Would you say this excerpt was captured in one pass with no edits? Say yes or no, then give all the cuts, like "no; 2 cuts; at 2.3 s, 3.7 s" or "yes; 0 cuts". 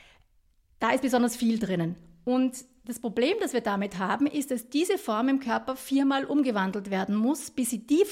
yes; 0 cuts